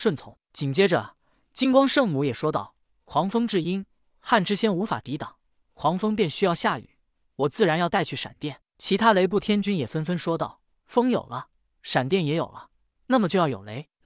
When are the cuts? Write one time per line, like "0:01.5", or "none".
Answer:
none

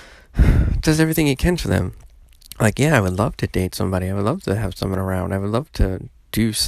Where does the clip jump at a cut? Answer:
none

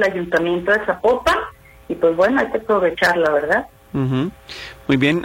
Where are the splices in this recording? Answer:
none

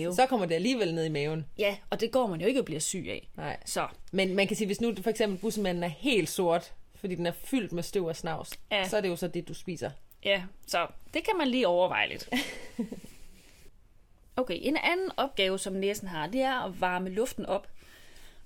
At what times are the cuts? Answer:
none

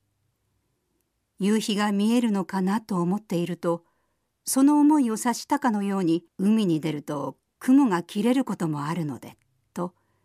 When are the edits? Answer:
0:06.3

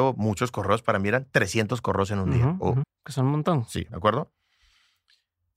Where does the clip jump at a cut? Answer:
0:02.8
0:03.9

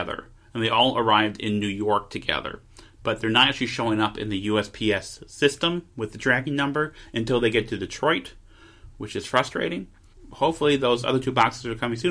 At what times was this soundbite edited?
none

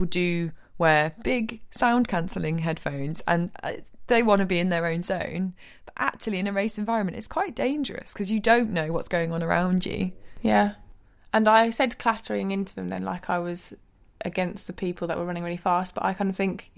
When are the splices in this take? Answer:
none

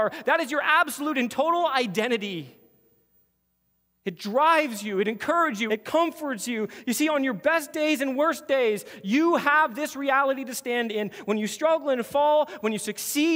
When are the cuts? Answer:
0:05.7

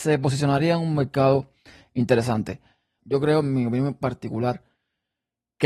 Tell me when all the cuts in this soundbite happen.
0:03.0
0:04.0

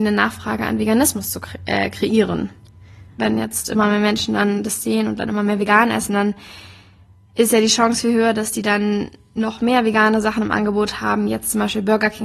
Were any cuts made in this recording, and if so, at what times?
0:03.2

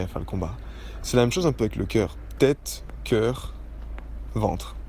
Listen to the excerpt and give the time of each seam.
0:02.4

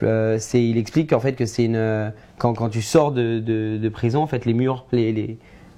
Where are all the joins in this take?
none

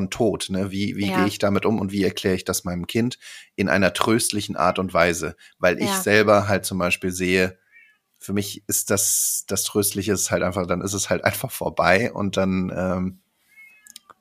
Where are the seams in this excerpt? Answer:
none

